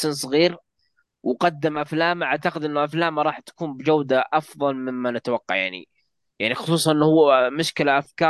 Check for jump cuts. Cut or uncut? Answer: uncut